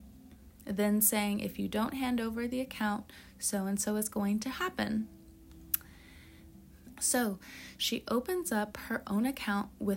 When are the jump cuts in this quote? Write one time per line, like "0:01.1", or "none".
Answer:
0:06.9